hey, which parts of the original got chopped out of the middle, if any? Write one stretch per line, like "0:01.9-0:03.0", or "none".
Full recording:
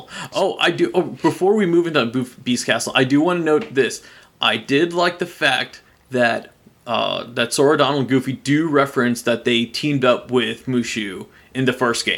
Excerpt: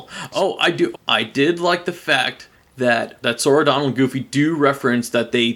0:00.9-0:04.3
0:06.6-0:07.3